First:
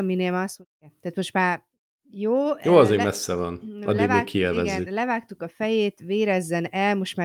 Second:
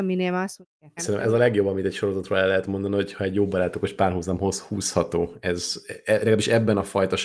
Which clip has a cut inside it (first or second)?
second